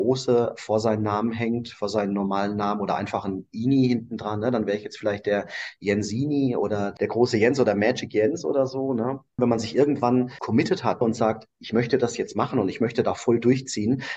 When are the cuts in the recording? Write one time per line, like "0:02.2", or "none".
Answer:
none